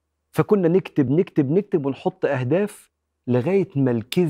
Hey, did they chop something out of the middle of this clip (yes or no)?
no